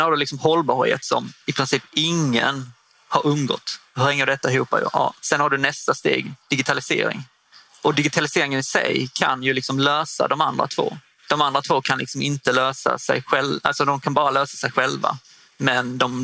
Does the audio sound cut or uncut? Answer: uncut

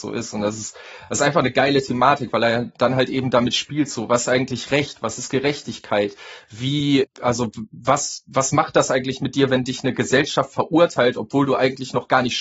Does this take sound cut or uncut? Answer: cut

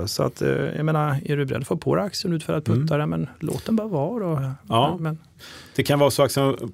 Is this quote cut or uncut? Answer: uncut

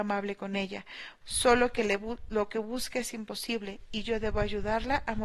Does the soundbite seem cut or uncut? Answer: cut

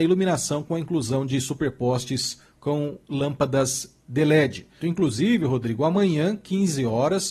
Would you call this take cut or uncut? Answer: cut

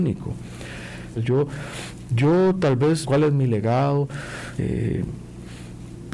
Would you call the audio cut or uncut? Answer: cut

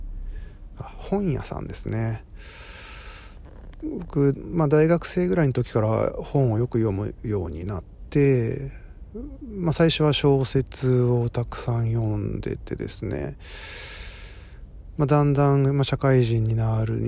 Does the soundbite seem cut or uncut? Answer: uncut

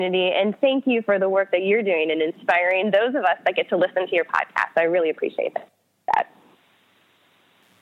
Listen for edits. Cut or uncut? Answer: uncut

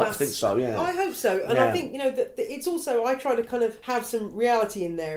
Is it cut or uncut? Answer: uncut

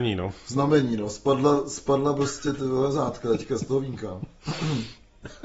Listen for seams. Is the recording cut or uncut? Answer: uncut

